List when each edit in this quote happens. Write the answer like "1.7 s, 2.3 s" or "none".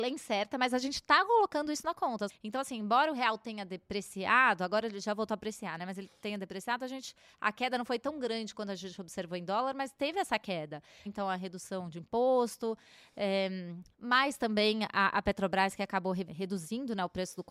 2.3 s, 11.1 s, 16.3 s